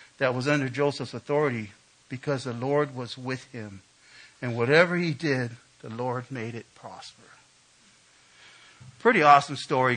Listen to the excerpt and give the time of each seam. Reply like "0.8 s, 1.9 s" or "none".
none